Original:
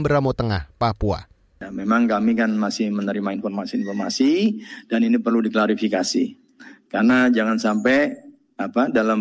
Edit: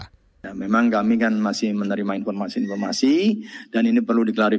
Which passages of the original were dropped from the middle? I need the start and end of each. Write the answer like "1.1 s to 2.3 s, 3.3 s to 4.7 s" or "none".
none

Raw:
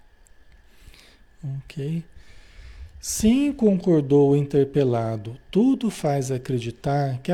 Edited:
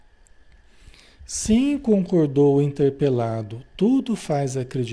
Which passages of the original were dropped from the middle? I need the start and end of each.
1.2 s to 2.9 s

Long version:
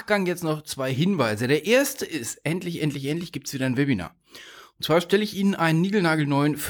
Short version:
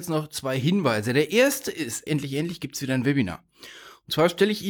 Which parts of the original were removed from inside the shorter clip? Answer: 2.4 s to 2.8 s

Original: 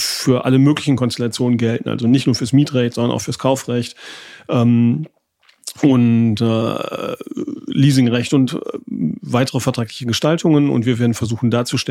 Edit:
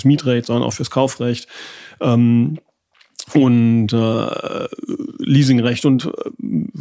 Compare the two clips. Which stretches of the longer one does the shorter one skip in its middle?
none

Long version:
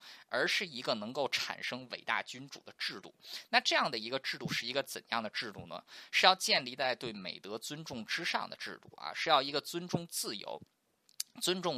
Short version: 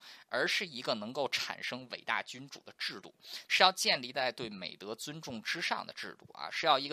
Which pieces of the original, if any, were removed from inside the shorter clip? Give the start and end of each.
3.5 s to 6.1 s

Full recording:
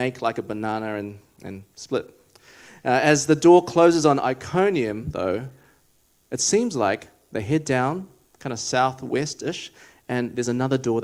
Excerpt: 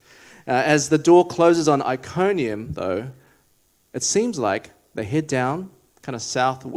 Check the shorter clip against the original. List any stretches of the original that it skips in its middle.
none

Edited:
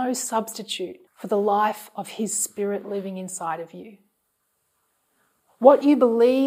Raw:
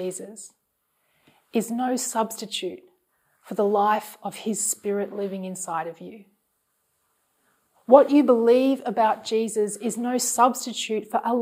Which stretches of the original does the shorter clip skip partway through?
2.9 s to 3.3 s

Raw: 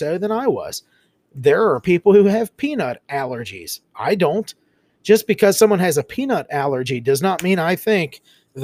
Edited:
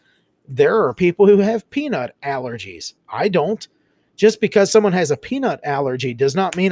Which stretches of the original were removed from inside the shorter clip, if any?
none

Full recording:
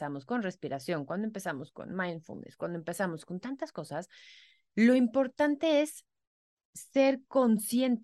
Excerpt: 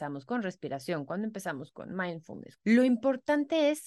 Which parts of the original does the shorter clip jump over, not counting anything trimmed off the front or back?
2.6 s to 4.7 s

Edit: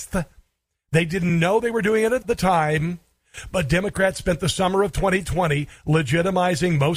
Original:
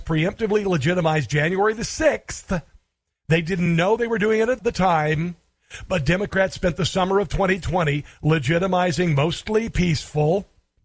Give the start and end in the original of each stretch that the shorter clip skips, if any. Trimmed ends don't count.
none

